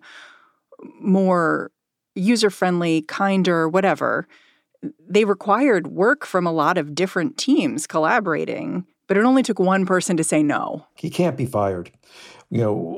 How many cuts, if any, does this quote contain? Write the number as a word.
two